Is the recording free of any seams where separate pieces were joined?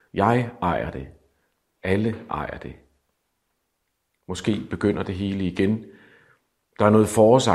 yes; 0 cuts

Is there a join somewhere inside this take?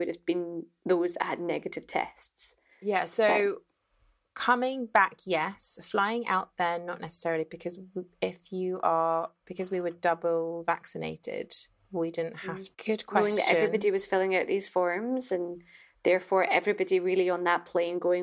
yes; 1 cut; at 12.7 s

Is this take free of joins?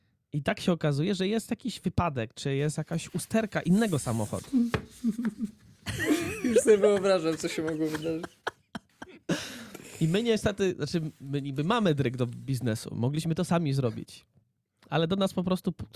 yes; 0 cuts

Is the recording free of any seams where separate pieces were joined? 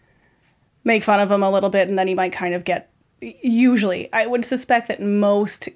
yes; 0 cuts

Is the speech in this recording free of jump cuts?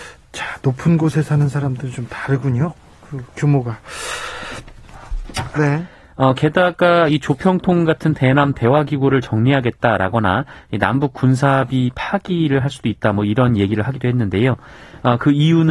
no; 1 cut; at 5.6 s

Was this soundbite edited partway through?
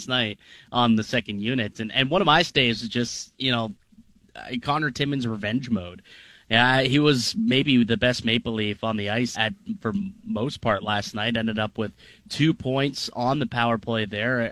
yes; 1 cut; at 9.3 s

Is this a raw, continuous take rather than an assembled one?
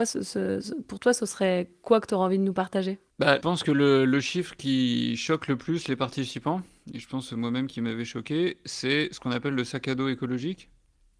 no; 1 cut; at 3.4 s

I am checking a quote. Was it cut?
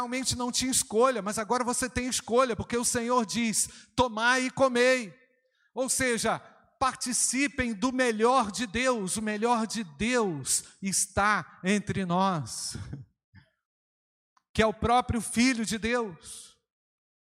no; 0 cuts

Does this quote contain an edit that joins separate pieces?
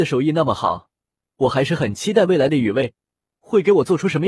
no; 0 cuts

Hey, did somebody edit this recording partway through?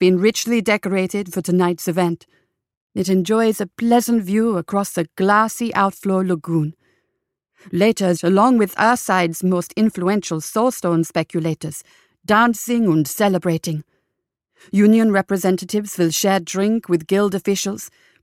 yes; 1 cut; at 8.2 s

